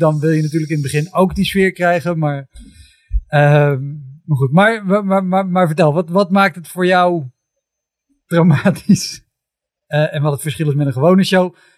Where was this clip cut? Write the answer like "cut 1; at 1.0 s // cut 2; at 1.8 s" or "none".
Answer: cut 1; at 9.9 s